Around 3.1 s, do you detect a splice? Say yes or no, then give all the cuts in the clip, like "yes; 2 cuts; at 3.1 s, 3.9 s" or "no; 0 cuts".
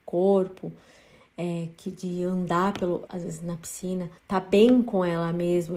yes; 2 cuts; at 3.1 s, 4.2 s